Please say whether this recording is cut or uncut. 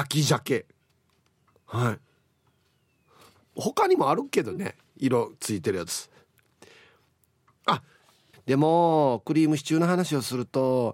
cut